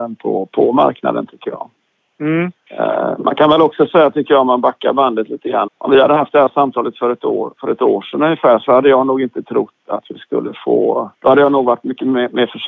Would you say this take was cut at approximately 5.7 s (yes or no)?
yes